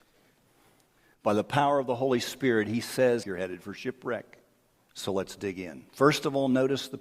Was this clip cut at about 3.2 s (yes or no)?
yes